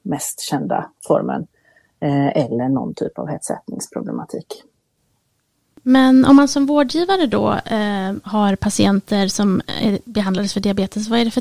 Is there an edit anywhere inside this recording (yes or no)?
no